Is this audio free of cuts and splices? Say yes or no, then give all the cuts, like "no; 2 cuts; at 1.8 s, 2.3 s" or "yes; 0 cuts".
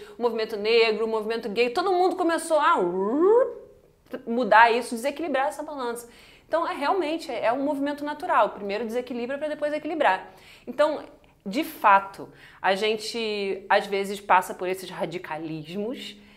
yes; 0 cuts